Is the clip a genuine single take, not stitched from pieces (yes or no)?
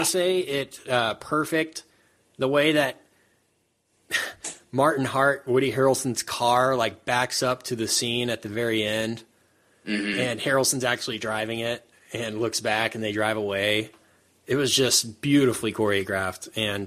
yes